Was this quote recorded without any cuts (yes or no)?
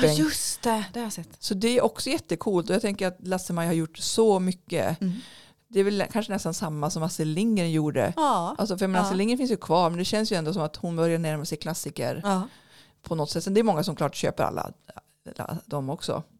yes